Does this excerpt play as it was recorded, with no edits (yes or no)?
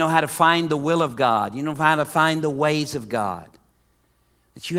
yes